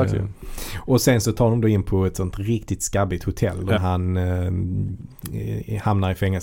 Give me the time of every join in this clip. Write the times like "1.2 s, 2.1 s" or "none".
3.8 s

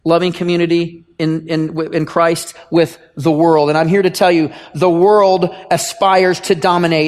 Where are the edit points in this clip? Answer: none

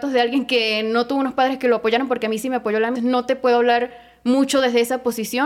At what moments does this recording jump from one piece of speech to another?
3.0 s

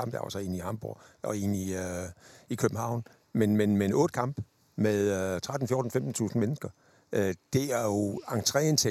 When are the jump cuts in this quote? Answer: none

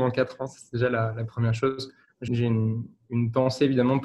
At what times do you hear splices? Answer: 2.3 s

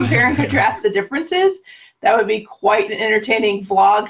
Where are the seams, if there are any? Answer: none

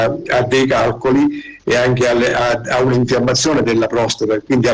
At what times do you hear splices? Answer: none

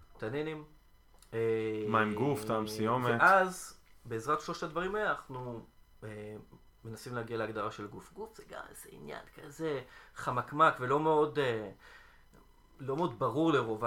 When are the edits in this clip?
none

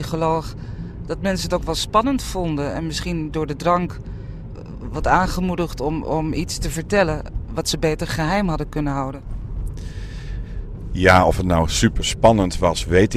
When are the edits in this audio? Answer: none

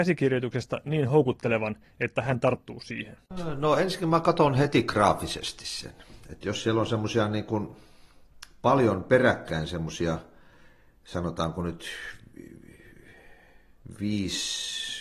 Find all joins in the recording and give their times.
none

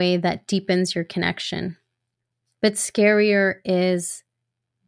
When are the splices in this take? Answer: 2.4 s

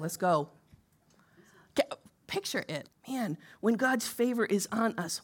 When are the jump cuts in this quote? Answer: 2.9 s

